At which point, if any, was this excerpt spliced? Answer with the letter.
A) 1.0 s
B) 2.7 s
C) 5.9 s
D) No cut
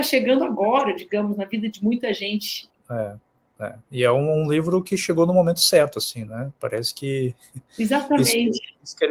B